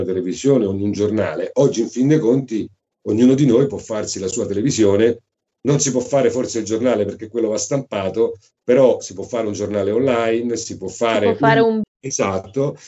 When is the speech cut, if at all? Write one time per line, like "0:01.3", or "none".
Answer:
0:11.8